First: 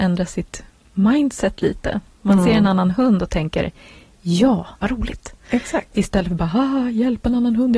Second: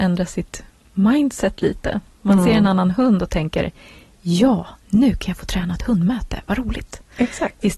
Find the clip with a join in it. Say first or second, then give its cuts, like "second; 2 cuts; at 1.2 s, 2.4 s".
first; 1 cut; at 4.8 s